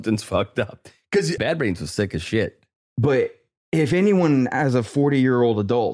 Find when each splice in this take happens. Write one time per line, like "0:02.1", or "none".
0:01.4
0:02.8